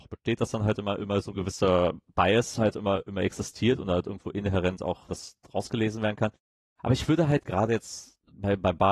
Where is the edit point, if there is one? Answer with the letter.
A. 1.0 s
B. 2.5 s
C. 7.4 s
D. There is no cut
C